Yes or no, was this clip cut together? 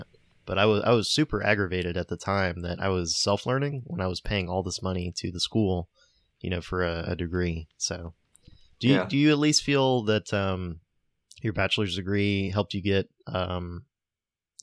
no